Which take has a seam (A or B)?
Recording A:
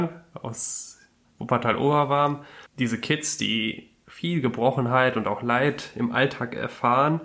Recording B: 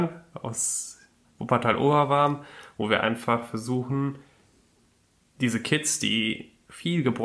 A